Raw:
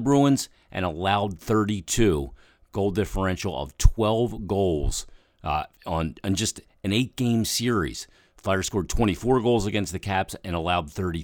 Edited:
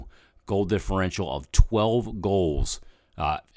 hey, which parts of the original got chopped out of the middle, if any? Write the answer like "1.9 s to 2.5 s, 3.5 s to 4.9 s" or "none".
none

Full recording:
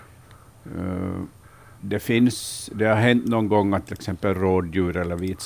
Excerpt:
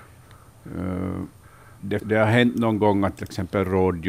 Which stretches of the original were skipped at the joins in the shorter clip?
2.0 s to 2.7 s

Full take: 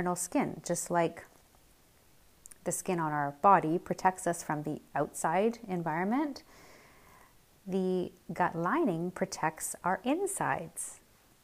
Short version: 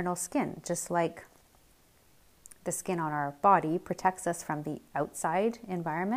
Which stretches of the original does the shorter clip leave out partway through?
none

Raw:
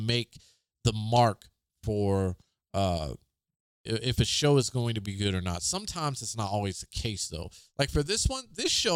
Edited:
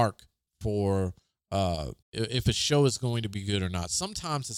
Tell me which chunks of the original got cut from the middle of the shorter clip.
3.2 s to 3.7 s

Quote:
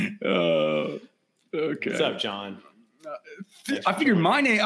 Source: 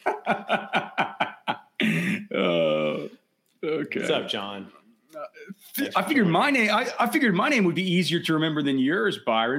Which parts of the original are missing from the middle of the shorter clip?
none

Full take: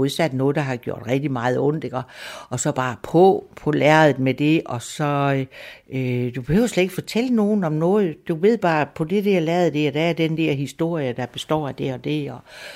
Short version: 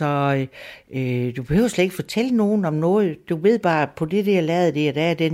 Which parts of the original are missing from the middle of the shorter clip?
none

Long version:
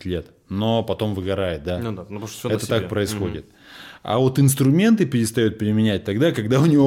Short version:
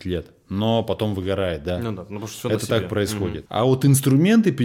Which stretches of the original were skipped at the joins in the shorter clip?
3.5 s to 4.0 s

